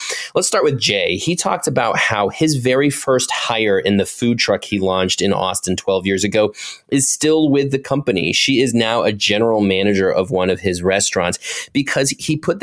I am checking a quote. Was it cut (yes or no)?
no